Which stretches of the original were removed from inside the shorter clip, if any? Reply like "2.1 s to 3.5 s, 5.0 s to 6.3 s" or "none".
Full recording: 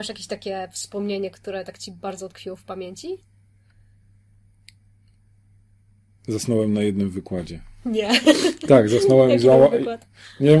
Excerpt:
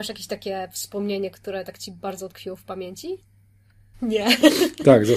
3.9 s to 7.8 s